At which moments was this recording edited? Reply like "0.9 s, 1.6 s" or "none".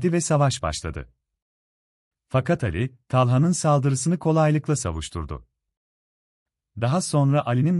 2.1 s